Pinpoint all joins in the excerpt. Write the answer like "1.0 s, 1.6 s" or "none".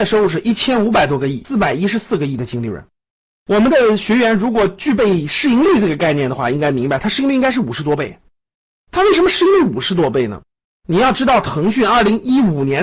none